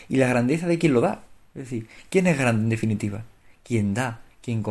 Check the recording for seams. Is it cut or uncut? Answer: uncut